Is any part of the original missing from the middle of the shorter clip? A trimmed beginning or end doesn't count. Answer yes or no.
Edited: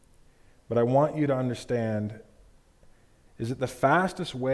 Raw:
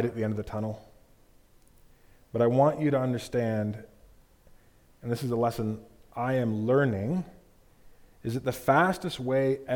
yes